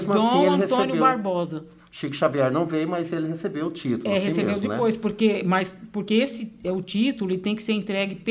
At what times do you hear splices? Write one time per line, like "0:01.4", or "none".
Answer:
none